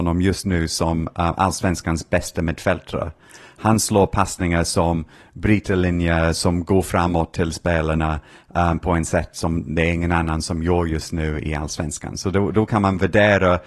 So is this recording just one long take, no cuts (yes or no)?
yes